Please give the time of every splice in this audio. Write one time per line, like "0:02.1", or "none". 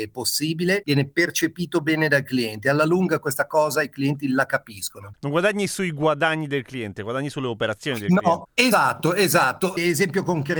0:08.7